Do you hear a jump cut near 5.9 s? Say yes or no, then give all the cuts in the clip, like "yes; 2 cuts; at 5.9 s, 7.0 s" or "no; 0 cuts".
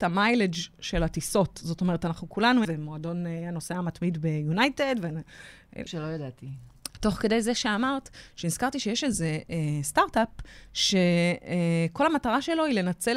yes; 2 cuts; at 2.7 s, 5.9 s